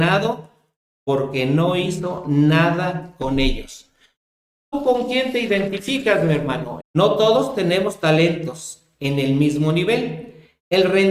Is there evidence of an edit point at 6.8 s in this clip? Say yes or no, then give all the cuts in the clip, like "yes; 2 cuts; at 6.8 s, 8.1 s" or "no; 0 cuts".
yes; 1 cut; at 6.8 s